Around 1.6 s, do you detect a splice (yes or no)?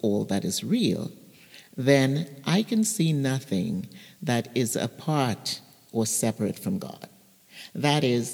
no